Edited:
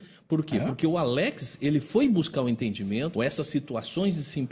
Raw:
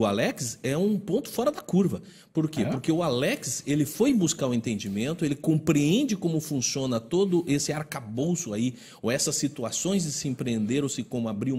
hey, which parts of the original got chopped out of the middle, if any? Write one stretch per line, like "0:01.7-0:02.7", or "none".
0:05.2-0:09.0

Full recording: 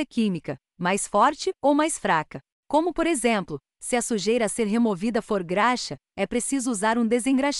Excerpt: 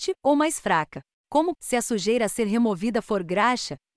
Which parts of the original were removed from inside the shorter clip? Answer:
0:02.9-0:03.7

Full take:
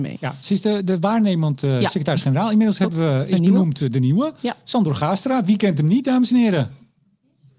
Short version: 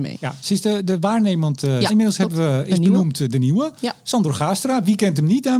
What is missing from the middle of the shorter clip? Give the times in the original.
0:01.9-0:02.5

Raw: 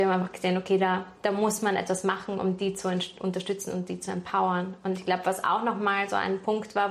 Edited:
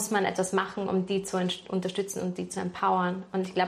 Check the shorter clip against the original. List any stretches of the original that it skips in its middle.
none

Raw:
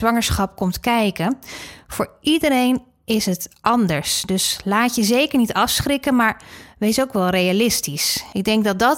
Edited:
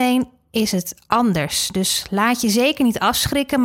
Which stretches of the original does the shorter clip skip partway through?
none

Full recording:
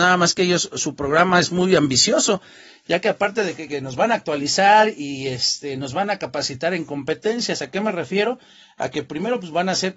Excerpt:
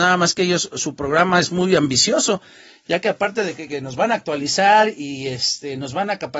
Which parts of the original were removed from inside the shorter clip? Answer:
none

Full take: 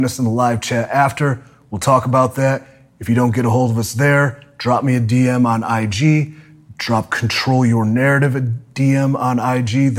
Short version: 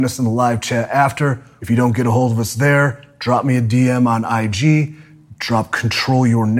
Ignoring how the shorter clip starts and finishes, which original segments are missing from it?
0:01.6-0:03.0

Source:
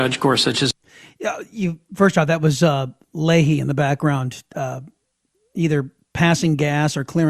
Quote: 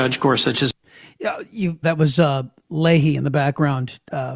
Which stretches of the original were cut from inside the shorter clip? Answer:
0:01.8-0:02.3

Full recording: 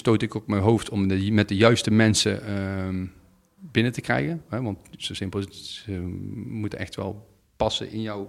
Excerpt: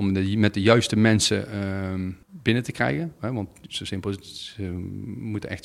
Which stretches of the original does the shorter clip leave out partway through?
0:03.2-0:03.5

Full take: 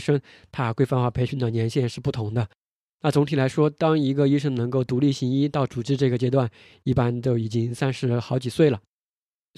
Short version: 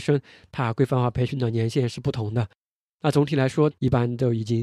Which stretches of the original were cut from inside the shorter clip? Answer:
0:03.7-0:06.7

